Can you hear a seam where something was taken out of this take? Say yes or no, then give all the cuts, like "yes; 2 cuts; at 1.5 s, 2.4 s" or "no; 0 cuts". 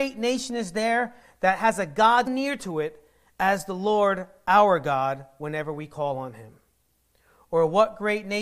yes; 1 cut; at 2.3 s